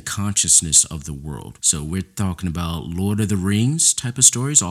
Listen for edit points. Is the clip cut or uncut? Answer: cut